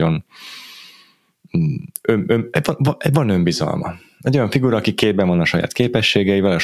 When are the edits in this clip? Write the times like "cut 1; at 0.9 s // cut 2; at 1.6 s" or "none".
none